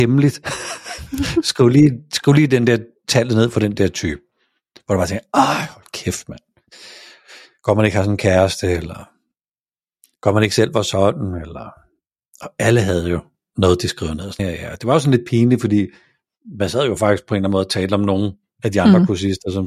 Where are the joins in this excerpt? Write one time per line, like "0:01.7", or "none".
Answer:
0:14.4